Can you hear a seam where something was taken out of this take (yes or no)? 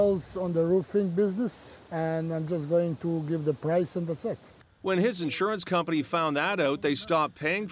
yes